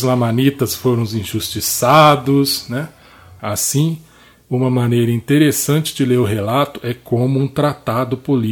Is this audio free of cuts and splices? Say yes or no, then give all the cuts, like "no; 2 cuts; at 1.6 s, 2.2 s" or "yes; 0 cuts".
no; 1 cut; at 3.4 s